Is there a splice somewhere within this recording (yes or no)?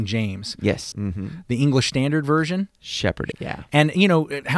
yes